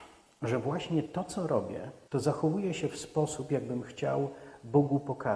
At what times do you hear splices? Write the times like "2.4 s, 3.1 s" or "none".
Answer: 2.0 s